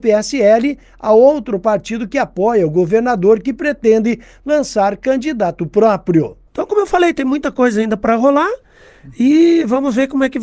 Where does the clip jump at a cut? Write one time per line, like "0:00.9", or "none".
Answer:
0:06.5